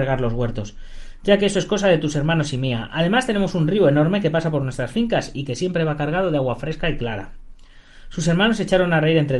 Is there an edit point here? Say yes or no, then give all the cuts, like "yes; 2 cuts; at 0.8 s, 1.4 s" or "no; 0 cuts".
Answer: no; 0 cuts